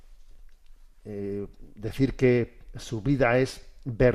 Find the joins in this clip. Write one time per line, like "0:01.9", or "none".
none